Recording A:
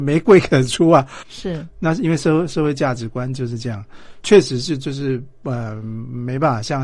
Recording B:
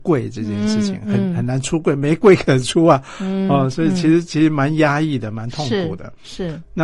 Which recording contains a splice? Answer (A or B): A